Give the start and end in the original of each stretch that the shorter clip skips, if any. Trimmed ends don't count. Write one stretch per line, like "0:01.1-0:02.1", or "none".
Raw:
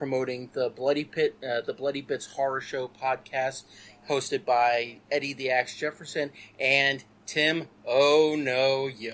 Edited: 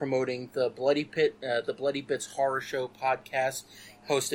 none